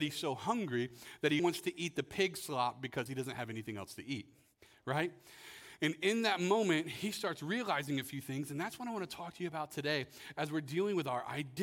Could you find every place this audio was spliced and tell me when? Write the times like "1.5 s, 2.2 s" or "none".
1.4 s